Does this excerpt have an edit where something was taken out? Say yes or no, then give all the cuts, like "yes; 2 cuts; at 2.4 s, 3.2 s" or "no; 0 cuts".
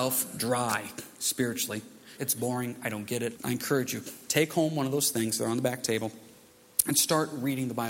yes; 2 cuts; at 2.2 s, 3.4 s